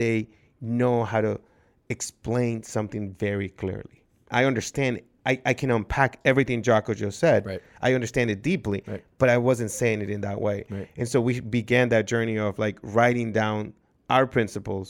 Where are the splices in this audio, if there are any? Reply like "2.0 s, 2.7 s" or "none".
4.3 s